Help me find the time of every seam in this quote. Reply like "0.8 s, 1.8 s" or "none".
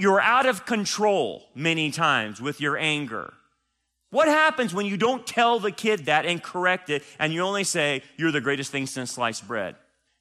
none

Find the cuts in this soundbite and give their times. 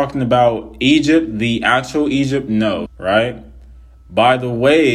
2.9 s

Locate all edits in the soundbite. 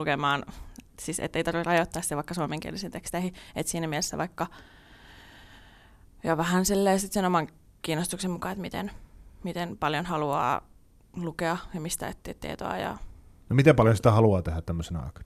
none

